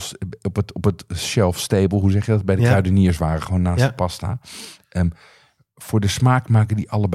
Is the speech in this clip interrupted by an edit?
no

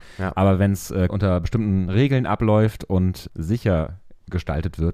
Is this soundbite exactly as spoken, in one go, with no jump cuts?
no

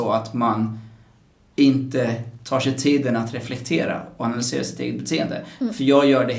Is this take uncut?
yes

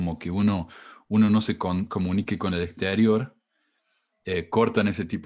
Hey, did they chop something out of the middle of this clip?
no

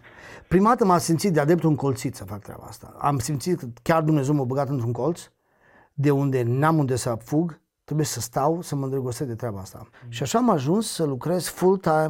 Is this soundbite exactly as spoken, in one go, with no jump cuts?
no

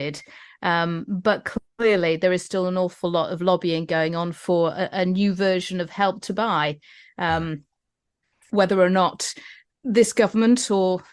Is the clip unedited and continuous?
yes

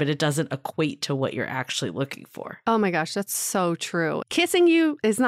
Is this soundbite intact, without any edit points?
no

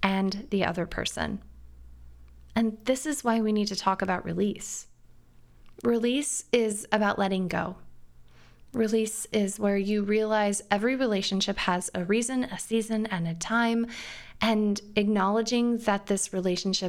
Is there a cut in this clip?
no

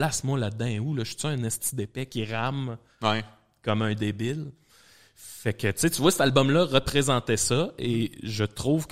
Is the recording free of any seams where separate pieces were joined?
yes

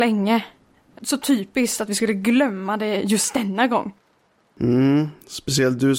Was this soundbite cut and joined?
yes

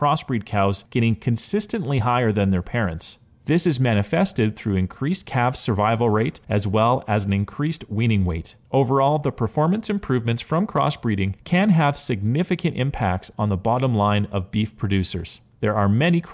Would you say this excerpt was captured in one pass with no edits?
no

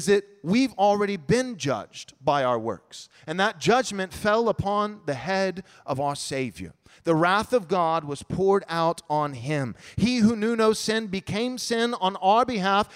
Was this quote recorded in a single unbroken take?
yes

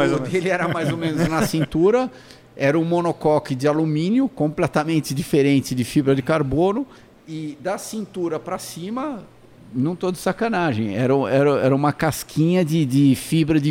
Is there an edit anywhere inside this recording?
no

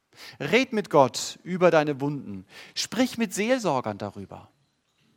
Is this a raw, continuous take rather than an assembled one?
yes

